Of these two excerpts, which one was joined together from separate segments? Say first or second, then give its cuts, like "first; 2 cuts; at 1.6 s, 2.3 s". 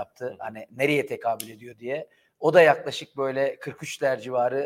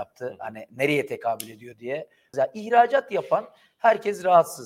second; 1 cut; at 2.3 s